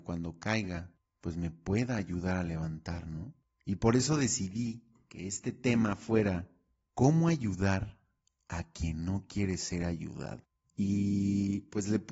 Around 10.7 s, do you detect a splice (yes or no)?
no